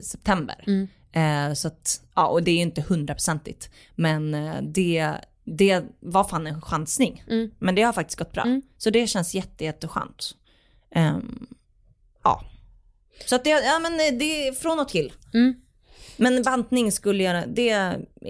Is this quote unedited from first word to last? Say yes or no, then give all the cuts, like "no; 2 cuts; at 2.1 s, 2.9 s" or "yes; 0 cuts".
yes; 0 cuts